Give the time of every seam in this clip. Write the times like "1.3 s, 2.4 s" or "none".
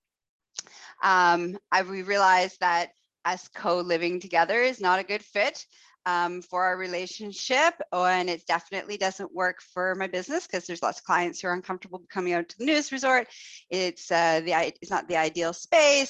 none